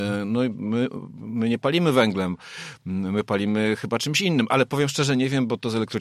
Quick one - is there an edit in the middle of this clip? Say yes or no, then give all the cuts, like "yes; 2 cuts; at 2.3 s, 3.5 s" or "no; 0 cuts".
no; 0 cuts